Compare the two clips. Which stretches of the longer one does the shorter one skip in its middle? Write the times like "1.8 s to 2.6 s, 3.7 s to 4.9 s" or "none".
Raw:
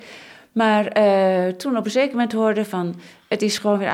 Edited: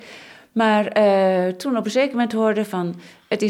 none